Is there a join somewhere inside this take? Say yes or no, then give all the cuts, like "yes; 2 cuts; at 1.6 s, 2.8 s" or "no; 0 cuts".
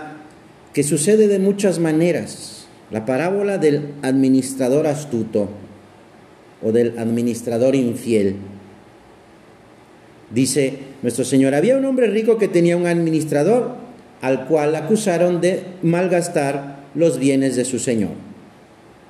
yes; 1 cut; at 2.8 s